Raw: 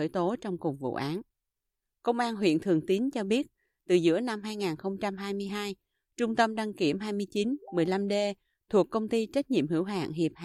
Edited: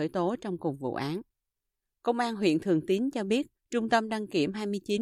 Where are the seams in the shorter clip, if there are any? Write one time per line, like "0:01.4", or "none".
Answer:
0:03.6